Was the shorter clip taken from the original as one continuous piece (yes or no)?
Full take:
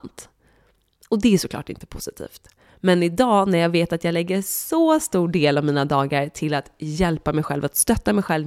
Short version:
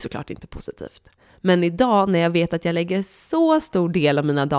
yes